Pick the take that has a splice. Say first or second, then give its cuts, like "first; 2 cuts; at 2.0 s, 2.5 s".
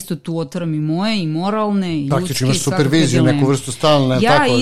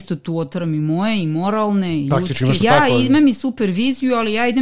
second; 1 cut; at 2.6 s